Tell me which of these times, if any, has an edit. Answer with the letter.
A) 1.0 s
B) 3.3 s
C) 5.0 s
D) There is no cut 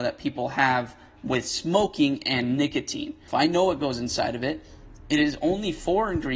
B